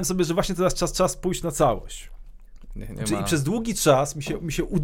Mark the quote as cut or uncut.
uncut